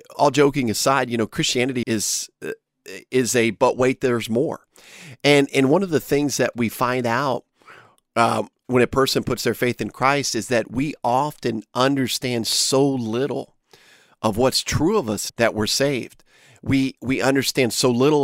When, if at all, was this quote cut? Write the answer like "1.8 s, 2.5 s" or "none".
1.8 s, 15.3 s